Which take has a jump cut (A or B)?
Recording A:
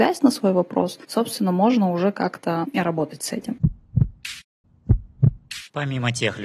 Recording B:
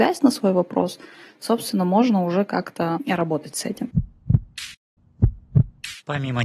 A